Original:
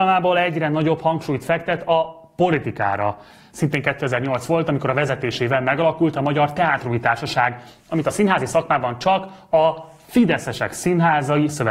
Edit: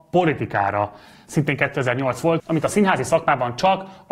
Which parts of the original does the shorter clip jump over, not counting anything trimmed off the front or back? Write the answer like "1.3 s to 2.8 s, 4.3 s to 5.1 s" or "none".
4.6 s to 7.8 s